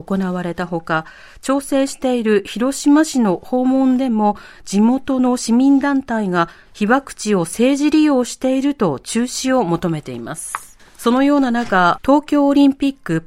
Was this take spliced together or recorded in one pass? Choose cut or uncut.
cut